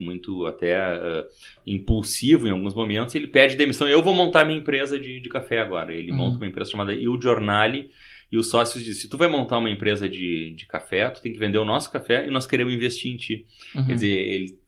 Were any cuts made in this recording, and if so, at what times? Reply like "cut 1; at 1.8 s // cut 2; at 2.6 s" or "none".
none